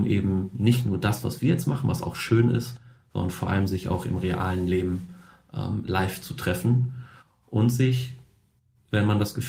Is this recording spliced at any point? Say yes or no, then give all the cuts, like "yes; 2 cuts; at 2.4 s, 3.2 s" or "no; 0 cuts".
no; 0 cuts